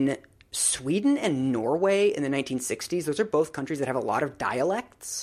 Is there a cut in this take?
no; 0 cuts

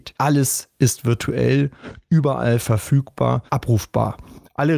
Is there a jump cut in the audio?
yes; 1 cut; at 3.5 s

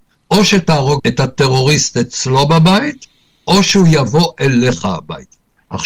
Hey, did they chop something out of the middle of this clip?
yes; 1 cut; at 1.0 s

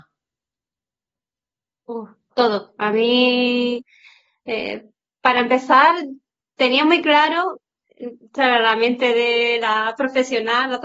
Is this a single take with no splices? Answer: yes; 0 cuts

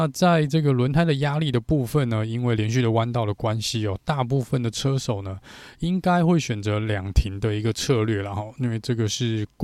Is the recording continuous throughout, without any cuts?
yes; 0 cuts

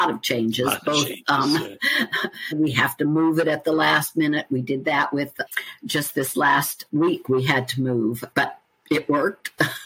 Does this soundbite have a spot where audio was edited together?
yes; 1 cut; at 2.5 s

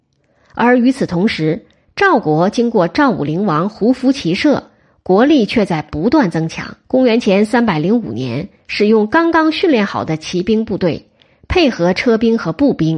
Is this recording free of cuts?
no; 2 cuts; at 6.8 s, 8.6 s

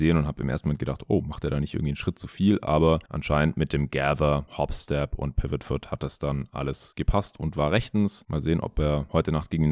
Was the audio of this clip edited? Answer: no; 0 cuts

